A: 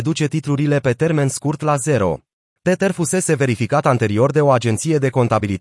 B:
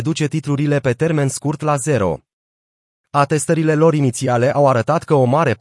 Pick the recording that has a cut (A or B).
A